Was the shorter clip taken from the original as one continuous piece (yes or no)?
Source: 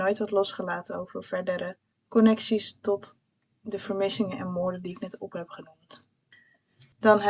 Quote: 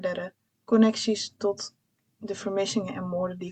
yes